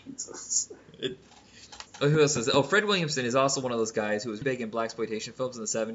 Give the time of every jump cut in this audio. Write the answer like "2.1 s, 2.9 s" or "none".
1.9 s, 4.4 s